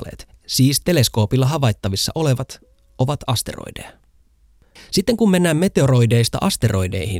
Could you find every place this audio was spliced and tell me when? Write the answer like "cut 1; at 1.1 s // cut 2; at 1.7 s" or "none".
cut 1; at 4.8 s